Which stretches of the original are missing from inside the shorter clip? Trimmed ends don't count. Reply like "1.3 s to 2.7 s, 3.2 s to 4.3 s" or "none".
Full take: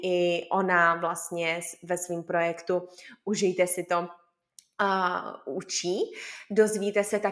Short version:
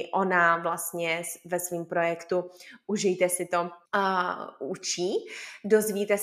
4.2 s to 4.7 s